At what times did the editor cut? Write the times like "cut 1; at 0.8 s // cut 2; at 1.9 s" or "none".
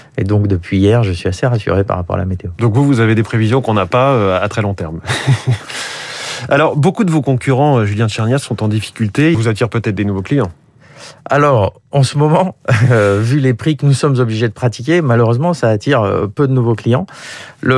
cut 1; at 9.3 s